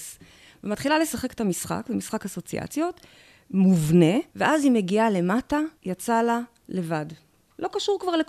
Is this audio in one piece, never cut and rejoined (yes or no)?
no